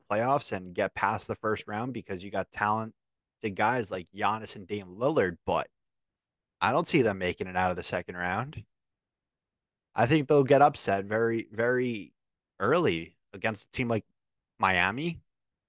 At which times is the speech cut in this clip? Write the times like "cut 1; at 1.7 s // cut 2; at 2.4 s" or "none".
none

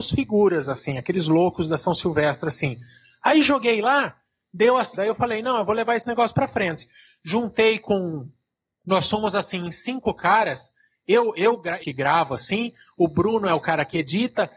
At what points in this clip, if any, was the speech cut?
cut 1; at 4.9 s // cut 2; at 11.8 s

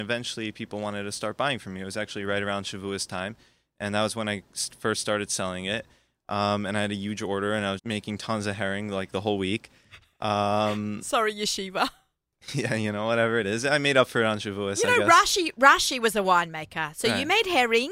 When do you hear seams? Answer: cut 1; at 7.8 s

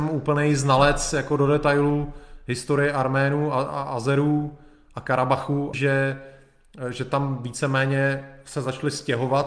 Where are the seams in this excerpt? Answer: cut 1; at 5.7 s

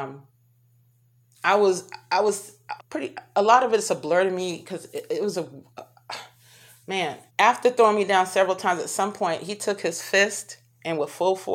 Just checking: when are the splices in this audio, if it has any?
cut 1; at 2.8 s // cut 2; at 5.3 s // cut 3; at 7.3 s

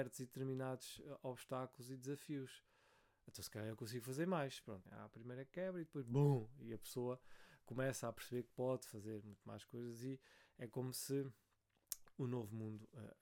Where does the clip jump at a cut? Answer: cut 1; at 4.8 s

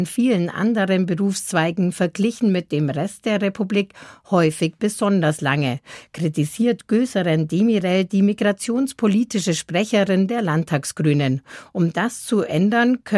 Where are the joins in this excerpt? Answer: none

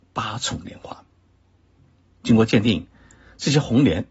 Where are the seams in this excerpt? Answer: none

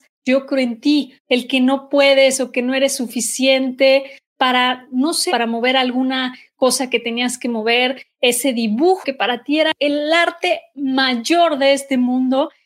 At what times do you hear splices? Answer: cut 1; at 1.2 s // cut 2; at 5.3 s

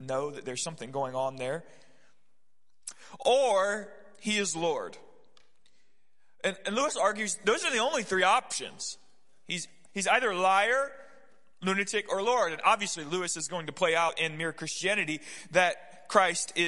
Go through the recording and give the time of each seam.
none

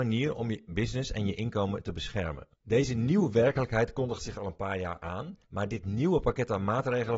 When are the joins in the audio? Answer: cut 1; at 2.5 s // cut 2; at 5.4 s

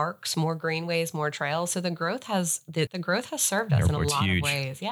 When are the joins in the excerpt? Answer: cut 1; at 2.9 s

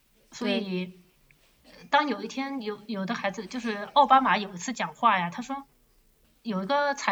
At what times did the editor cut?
none

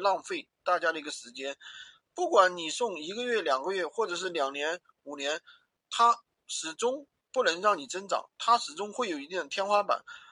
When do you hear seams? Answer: none

